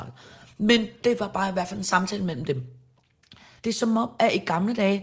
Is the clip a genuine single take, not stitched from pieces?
no; 1 cut; at 3.6 s

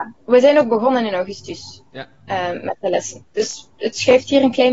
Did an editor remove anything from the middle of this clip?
no; 0 cuts

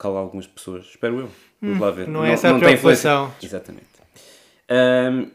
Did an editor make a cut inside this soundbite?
yes; 2 cuts; at 2.1 s, 3.4 s

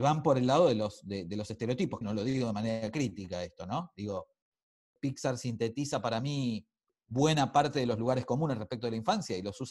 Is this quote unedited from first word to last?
no; 1 cut; at 2.0 s

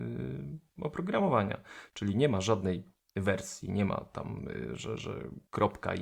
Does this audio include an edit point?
no; 0 cuts

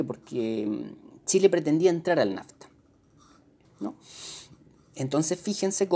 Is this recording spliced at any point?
yes; 1 cut; at 3.6 s

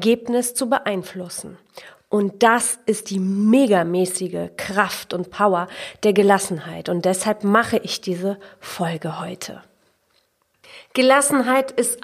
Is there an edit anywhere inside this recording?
no; 0 cuts

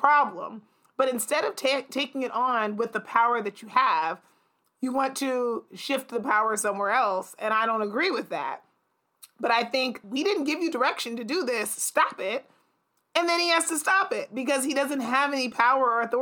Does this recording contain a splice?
yes; 1 cut; at 10.0 s

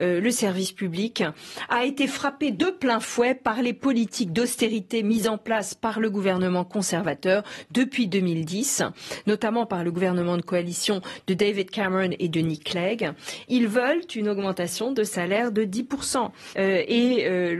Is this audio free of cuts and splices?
no; 2 cuts; at 13.5 s, 16.5 s

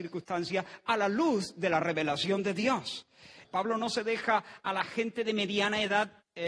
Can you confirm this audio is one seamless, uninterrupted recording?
no; 1 cut; at 3.4 s

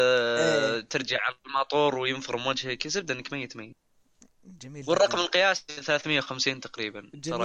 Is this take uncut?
no; 1 cut; at 4.6 s

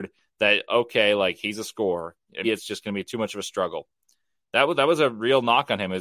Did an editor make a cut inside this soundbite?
yes; 1 cut; at 2.4 s

